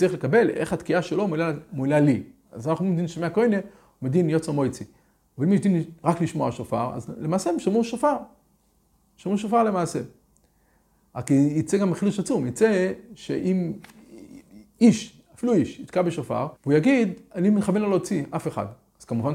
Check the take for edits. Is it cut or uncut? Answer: cut